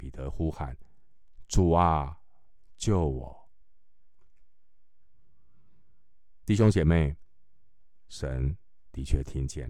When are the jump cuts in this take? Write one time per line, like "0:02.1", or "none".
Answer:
0:08.1